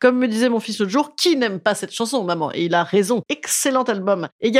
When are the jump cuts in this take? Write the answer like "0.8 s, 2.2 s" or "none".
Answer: 3.3 s